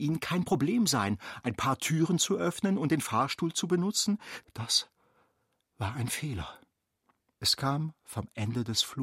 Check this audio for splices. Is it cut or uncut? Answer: cut